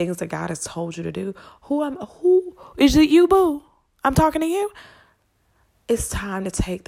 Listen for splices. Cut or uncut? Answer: uncut